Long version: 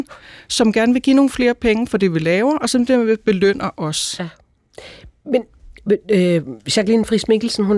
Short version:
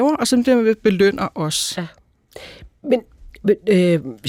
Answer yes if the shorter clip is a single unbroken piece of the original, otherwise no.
yes